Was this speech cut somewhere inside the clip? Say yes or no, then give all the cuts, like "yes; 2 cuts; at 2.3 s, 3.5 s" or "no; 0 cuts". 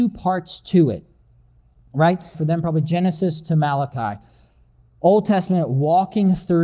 yes; 1 cut; at 2.3 s